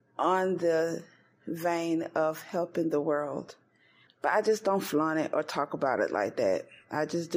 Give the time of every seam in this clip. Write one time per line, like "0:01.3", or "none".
0:04.1

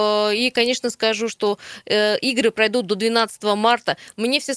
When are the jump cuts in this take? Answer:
none

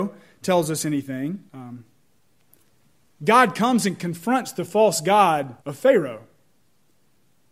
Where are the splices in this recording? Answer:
0:01.5
0:05.6

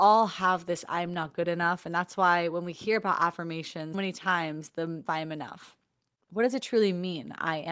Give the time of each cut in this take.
0:03.9
0:05.1

